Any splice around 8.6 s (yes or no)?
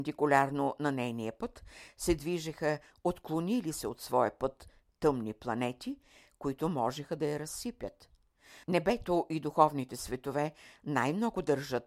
yes